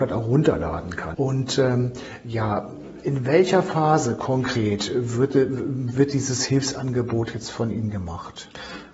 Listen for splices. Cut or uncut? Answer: cut